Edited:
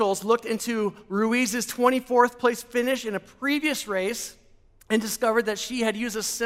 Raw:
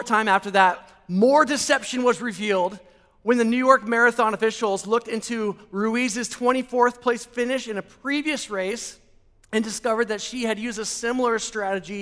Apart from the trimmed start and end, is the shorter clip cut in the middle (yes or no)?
no